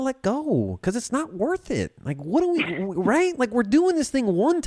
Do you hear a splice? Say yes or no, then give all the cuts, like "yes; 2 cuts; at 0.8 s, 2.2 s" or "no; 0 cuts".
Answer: no; 0 cuts